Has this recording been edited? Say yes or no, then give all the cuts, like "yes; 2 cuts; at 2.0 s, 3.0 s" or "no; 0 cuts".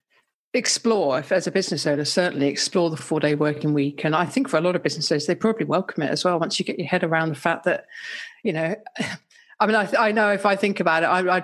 no; 0 cuts